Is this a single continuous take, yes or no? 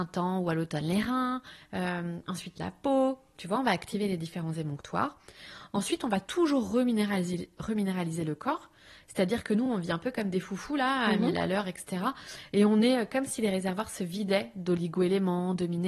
yes